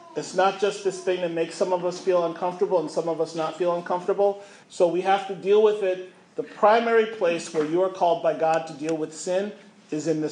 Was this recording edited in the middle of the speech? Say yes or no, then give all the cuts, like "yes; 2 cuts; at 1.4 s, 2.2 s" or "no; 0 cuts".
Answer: yes; 1 cut; at 4.6 s